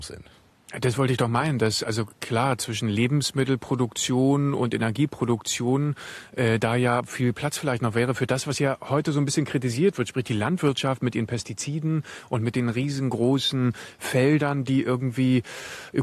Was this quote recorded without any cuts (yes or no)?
yes